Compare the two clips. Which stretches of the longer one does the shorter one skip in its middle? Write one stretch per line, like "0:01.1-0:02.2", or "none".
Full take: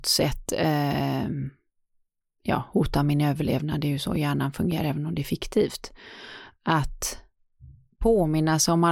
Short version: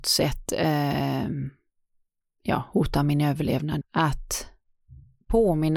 0:03.8-0:06.5